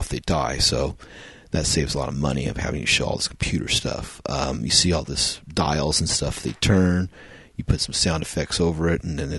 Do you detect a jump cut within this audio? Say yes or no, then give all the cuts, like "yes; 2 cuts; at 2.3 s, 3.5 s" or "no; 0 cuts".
no; 0 cuts